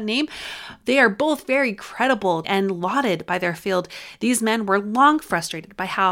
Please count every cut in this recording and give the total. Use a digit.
1